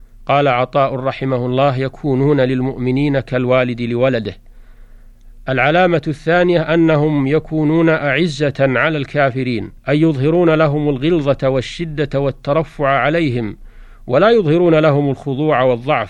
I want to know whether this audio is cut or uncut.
cut